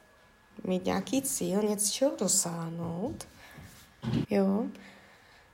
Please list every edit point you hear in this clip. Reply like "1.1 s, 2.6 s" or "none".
4.2 s